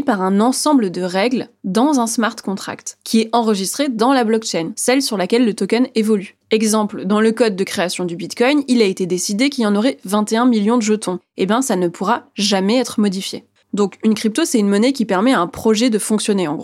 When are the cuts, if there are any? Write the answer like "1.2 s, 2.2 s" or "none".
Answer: 13.6 s